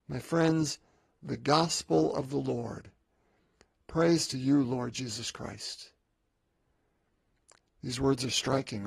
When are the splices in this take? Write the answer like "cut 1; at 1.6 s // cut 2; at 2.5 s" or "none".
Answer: none